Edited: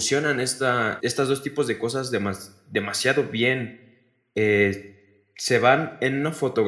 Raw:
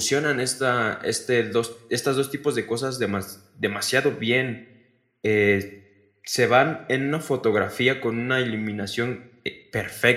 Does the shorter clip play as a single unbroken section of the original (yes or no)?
no